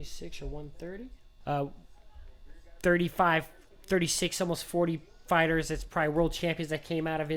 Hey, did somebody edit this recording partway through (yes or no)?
yes